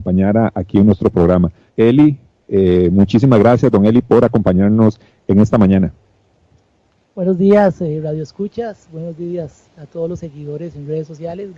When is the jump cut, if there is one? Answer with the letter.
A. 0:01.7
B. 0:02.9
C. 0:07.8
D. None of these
A